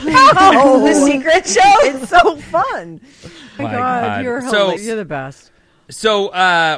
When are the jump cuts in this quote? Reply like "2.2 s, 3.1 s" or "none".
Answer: 3.6 s, 4.8 s